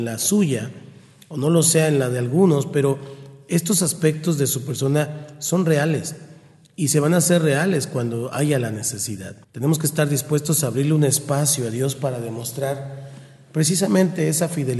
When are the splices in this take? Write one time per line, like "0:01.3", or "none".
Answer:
0:09.4